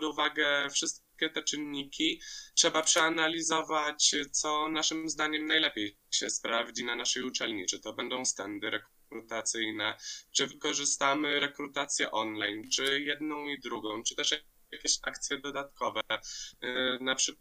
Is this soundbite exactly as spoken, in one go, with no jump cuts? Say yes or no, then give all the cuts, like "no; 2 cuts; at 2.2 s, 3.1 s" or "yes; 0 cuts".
yes; 0 cuts